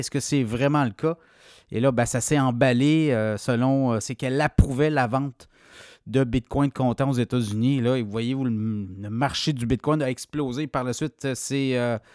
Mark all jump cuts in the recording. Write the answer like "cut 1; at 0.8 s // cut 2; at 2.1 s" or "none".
cut 1; at 4.0 s